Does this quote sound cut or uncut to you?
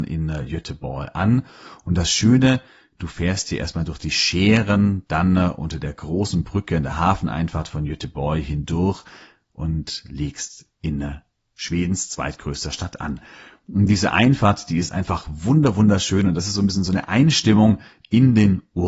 uncut